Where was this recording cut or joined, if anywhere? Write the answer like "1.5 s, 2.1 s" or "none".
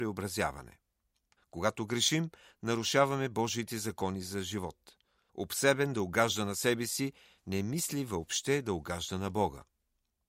1.4 s, 5.3 s